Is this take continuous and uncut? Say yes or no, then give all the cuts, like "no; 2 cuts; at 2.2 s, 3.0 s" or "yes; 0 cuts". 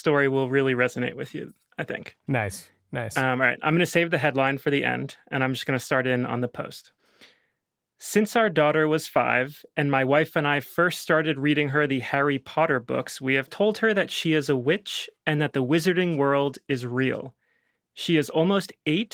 yes; 0 cuts